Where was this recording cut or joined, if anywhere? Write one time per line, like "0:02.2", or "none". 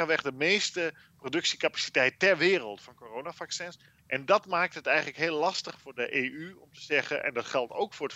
0:04.0